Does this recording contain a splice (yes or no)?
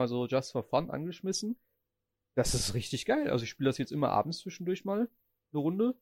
no